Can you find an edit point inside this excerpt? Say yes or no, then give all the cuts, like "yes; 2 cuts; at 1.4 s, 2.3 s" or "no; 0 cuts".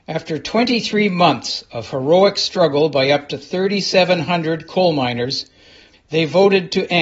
yes; 1 cut; at 5.9 s